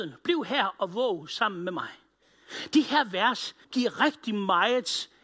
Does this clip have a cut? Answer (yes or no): yes